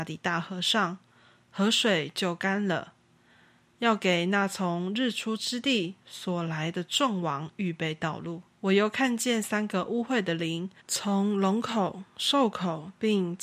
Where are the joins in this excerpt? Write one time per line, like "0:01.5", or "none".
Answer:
0:08.5
0:10.8